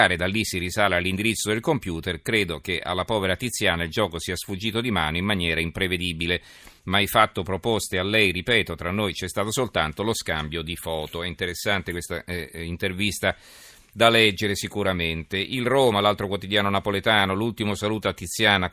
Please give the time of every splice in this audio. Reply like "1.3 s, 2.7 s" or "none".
none